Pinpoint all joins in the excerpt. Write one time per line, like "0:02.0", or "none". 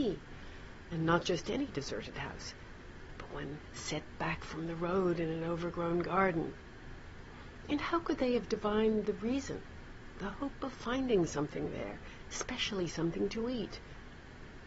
none